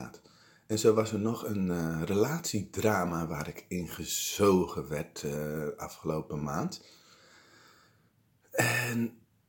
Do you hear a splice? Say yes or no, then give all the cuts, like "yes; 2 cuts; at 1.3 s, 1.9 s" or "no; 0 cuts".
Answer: no; 0 cuts